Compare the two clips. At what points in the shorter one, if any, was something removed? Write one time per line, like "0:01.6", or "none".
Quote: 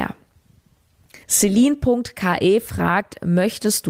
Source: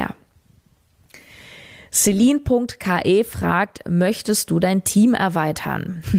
0:01.2